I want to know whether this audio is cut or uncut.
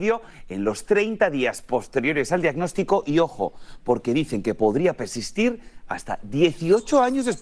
uncut